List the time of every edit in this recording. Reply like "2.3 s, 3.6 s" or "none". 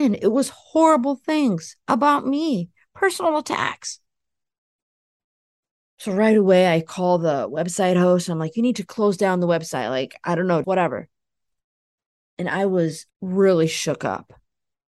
10.6 s, 13.1 s

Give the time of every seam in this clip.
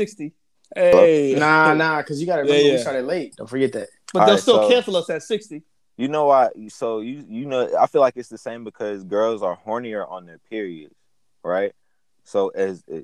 3.3 s

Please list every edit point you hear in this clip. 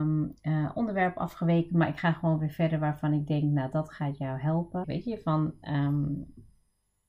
4.8 s

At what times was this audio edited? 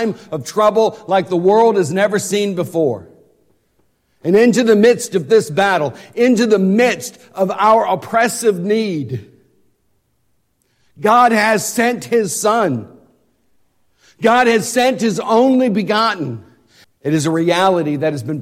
16.8 s

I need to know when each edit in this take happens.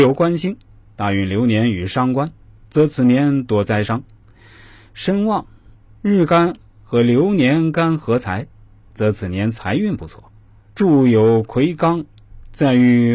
10.7 s

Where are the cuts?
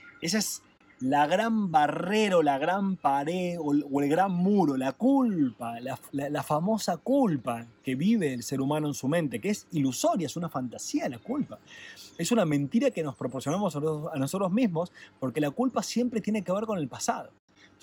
6.1 s

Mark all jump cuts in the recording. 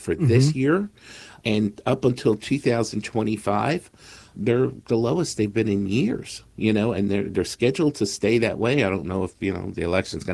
none

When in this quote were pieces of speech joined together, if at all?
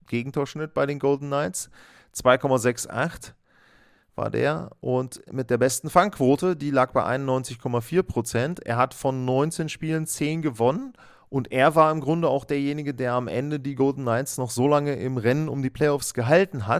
none

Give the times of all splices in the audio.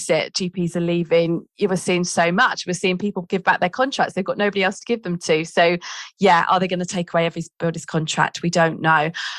none

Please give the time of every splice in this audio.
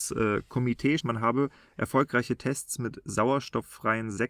1.0 s

